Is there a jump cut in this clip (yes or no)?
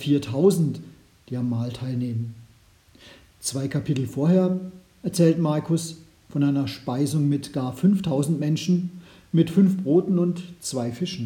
no